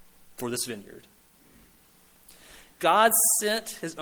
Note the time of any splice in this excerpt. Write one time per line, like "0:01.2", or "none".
0:02.7